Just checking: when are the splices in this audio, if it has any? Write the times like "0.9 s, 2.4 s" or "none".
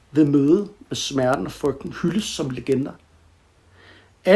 none